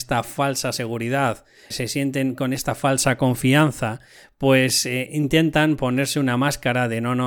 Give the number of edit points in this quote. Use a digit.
1